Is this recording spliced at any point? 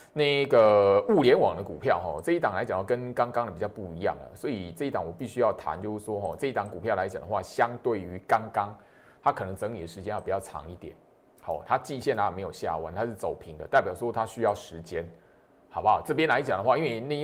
no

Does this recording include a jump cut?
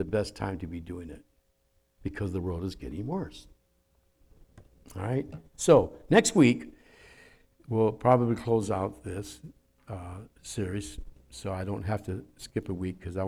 no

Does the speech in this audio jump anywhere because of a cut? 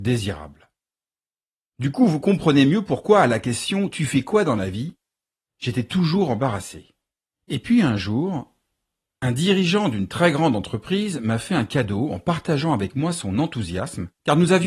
no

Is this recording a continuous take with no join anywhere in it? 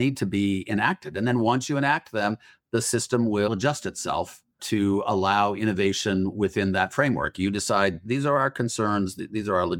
yes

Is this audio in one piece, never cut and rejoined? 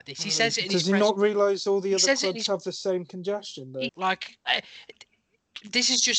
no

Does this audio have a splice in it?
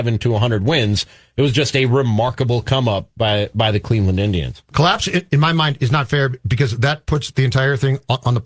no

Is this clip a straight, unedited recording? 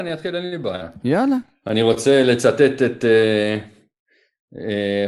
yes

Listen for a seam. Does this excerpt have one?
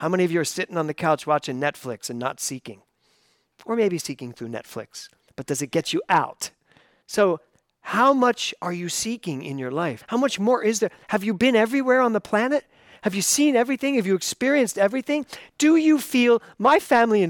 yes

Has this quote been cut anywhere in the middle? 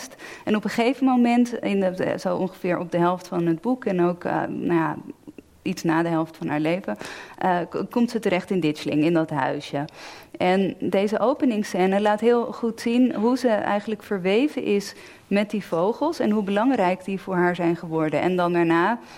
no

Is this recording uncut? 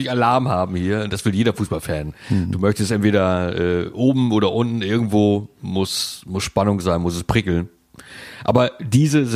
yes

